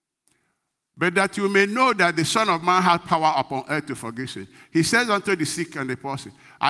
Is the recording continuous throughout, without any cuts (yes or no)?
yes